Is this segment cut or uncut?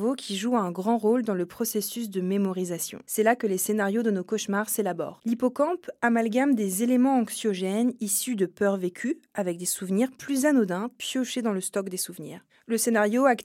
uncut